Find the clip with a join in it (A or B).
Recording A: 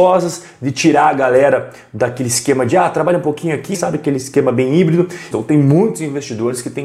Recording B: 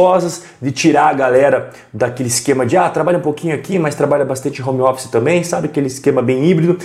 A